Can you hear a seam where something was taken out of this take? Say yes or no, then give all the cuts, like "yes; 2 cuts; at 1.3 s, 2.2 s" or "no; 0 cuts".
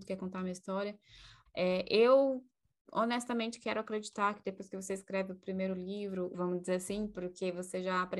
yes; 2 cuts; at 1.5 s, 6.3 s